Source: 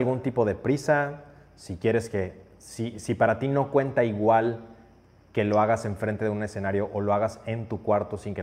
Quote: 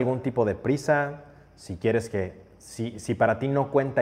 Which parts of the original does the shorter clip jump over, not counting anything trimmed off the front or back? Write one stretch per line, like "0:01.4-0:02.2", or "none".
none